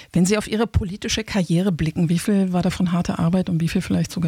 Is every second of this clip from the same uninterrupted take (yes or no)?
yes